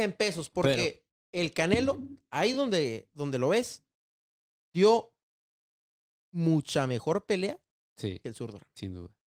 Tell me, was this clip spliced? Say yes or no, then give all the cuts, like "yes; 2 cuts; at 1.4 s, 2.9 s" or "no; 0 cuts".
no; 0 cuts